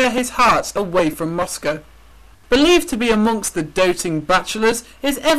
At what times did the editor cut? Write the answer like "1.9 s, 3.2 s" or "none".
2.5 s